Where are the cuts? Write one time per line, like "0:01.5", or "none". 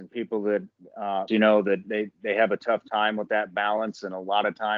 0:01.3